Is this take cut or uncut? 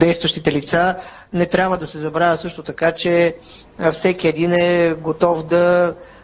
uncut